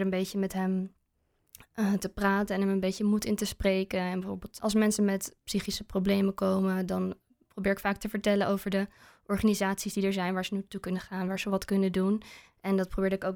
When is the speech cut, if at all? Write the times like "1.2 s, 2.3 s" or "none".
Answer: none